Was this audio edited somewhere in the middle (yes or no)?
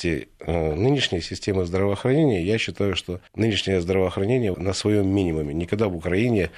yes